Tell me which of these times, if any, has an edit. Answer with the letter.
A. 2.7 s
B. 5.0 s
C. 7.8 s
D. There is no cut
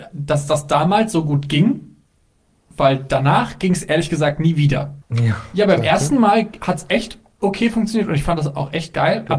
B